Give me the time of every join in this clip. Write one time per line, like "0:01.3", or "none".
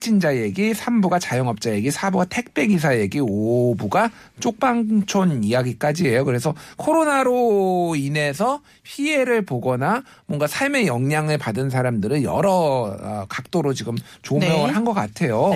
none